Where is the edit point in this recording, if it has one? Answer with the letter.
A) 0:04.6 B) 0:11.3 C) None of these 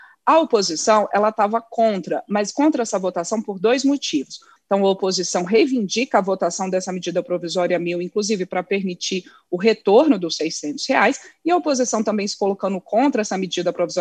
A